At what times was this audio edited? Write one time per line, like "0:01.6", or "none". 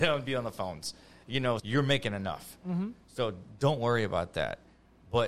0:01.6